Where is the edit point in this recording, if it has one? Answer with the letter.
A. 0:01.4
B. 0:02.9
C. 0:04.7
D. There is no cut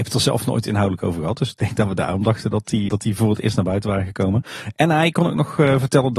B